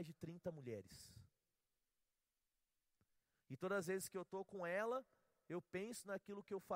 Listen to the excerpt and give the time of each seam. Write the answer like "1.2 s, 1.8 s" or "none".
none